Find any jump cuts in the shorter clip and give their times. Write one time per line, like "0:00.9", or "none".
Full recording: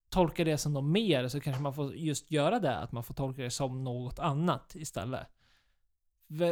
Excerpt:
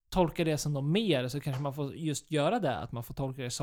none